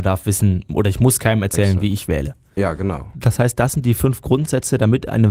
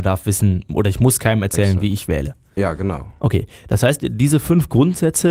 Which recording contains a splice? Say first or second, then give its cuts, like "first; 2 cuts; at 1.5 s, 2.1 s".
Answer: first; 1 cut; at 3.1 s